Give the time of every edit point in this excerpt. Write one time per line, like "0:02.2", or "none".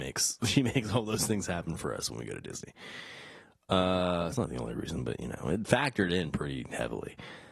none